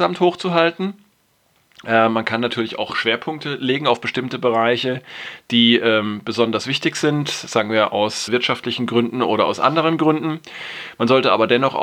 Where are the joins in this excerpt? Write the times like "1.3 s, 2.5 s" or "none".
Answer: 8.3 s